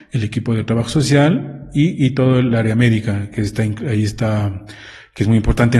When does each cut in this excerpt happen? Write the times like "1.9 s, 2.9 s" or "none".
none